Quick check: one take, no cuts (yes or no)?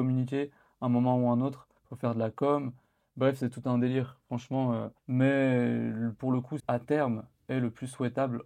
no